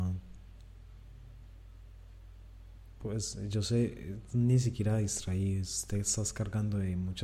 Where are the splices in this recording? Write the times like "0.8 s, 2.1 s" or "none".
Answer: none